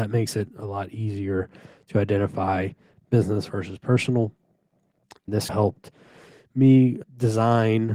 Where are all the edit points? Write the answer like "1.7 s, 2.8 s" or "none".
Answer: 5.2 s